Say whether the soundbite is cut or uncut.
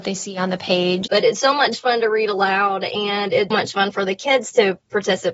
cut